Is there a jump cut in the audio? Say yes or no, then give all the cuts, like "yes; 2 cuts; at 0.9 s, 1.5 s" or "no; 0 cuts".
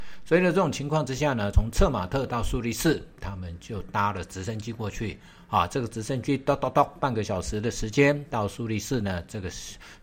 no; 0 cuts